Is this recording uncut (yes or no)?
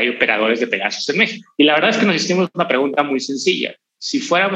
yes